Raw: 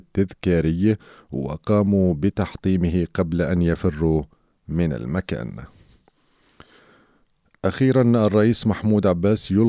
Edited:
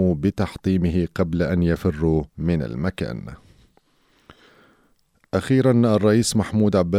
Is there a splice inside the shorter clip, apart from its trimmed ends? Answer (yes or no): yes